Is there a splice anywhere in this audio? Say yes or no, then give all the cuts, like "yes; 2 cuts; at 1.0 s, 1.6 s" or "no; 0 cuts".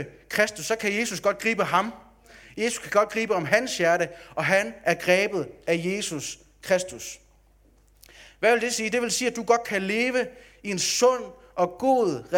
no; 0 cuts